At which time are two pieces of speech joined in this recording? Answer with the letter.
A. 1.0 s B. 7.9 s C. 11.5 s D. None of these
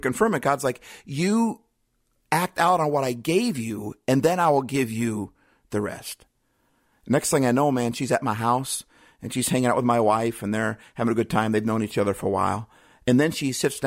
D